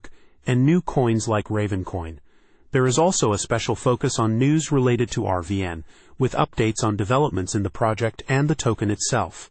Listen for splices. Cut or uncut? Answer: uncut